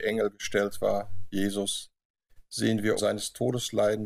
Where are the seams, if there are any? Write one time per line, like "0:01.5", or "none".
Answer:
0:03.0